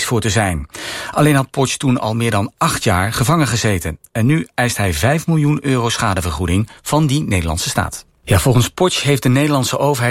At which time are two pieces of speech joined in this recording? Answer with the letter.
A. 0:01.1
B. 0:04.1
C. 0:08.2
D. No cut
C